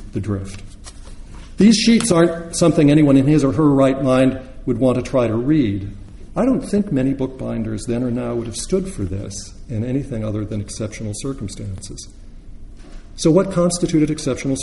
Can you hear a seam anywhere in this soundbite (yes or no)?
yes